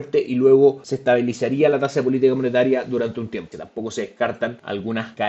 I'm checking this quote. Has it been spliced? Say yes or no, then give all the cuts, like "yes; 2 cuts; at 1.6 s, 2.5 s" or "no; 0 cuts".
yes; 1 cut; at 3.5 s